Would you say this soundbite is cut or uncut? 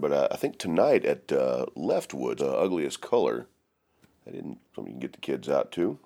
cut